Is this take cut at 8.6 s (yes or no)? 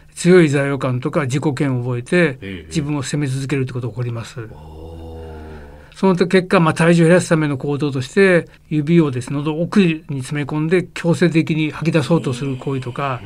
yes